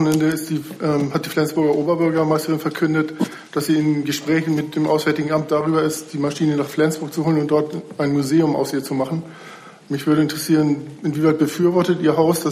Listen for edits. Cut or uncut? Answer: uncut